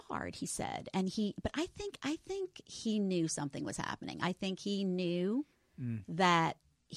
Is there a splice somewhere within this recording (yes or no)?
no